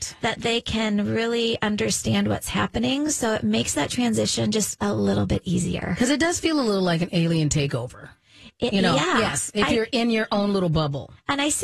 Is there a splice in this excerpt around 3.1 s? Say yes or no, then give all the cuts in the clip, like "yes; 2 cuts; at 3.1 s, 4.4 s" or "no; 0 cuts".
no; 0 cuts